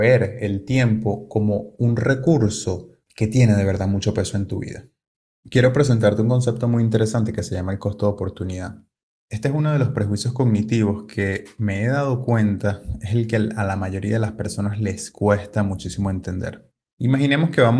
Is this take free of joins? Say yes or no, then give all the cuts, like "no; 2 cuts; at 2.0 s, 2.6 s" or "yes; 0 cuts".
yes; 0 cuts